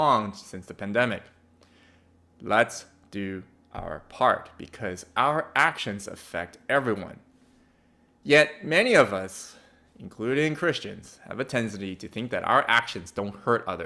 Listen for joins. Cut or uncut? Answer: uncut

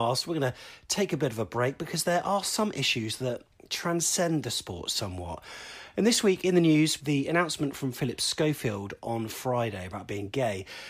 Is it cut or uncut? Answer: cut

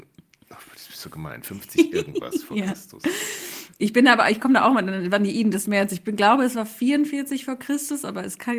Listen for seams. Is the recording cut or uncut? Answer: uncut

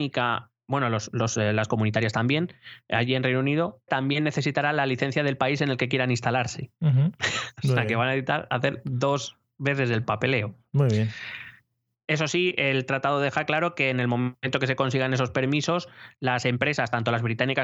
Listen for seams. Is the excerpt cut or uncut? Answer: cut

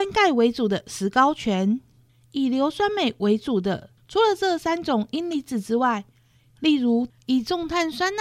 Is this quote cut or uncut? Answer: cut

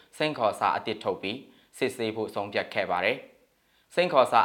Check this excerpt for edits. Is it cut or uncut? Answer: uncut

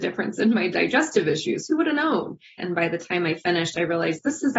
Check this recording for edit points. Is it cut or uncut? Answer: cut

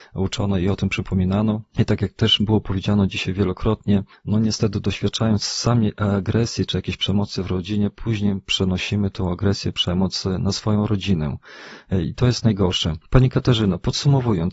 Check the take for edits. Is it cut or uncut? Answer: uncut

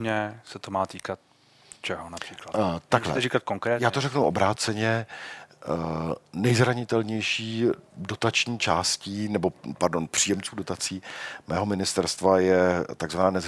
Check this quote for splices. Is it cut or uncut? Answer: uncut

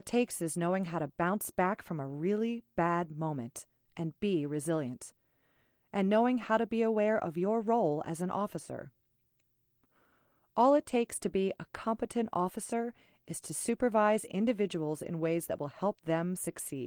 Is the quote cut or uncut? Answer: uncut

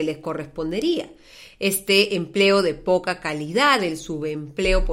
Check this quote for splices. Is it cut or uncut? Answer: uncut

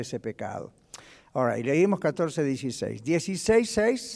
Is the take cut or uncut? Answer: uncut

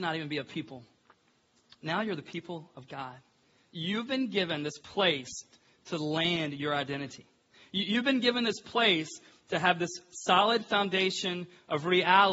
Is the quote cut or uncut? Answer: uncut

